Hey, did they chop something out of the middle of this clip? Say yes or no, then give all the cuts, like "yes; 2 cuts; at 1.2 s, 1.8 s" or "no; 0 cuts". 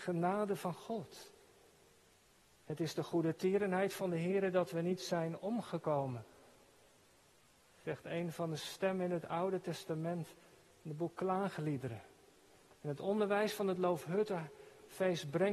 no; 0 cuts